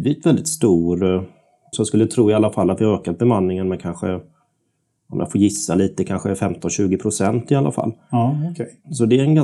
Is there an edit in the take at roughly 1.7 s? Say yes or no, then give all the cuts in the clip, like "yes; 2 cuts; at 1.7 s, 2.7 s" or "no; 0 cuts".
yes; 1 cut; at 1.7 s